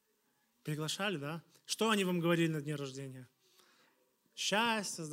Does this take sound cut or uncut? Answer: uncut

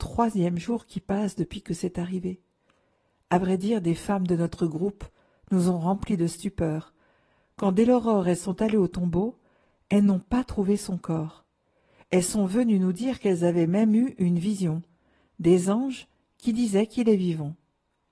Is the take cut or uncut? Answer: uncut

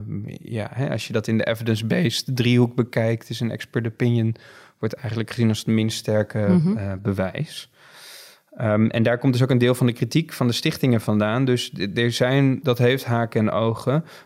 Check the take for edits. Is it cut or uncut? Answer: cut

